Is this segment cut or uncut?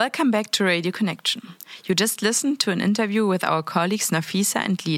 uncut